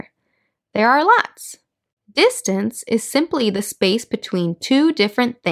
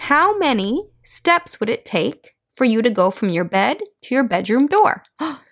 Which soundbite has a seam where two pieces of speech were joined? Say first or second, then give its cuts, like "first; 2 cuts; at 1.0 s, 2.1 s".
first; 1 cut; at 2.0 s